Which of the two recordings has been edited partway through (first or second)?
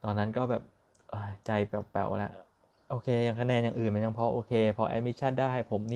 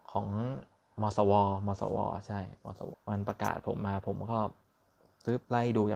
second